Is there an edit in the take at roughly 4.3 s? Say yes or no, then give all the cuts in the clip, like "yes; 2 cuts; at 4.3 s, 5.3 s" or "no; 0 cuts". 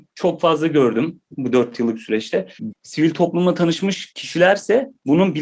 no; 1 cut; at 2.7 s